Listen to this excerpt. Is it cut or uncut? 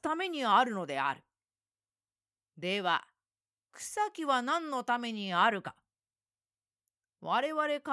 uncut